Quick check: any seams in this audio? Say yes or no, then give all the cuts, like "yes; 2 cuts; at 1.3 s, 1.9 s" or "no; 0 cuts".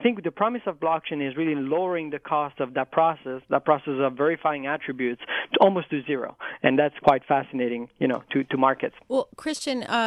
no; 0 cuts